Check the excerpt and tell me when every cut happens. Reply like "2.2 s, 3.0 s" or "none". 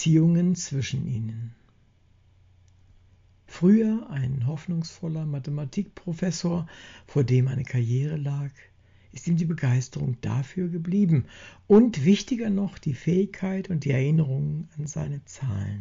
none